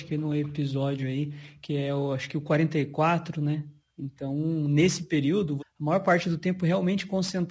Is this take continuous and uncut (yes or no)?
no